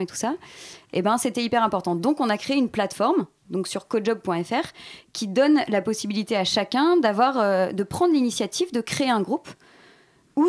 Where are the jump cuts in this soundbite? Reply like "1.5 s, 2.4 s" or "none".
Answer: none